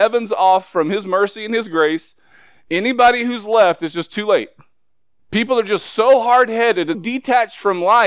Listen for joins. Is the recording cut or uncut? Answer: cut